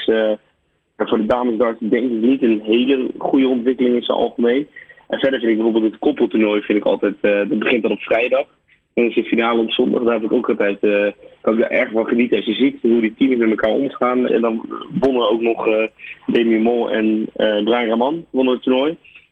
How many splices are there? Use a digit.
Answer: 1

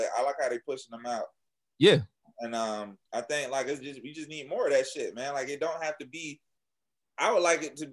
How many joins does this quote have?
1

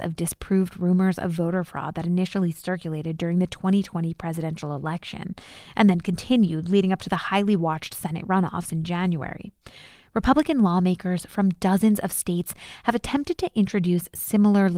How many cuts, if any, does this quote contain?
0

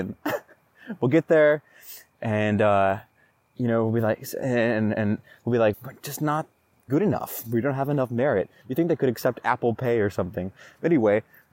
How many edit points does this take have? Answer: 2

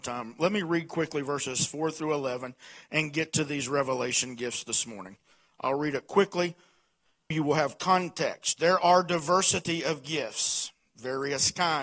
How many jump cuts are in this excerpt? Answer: 1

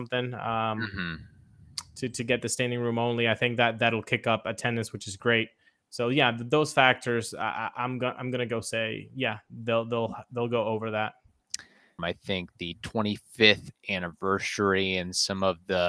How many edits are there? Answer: 1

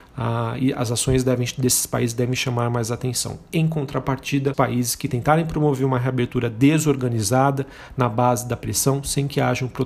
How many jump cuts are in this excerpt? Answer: 1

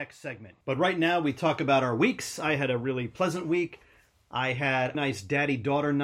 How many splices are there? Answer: 1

